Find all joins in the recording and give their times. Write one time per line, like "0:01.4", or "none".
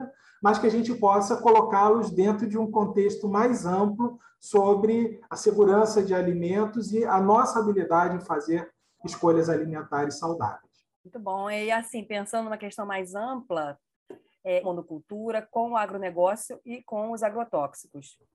0:10.9
0:14.6